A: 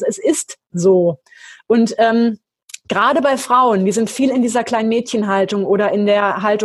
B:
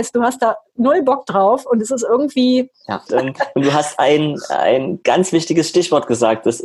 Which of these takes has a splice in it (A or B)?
B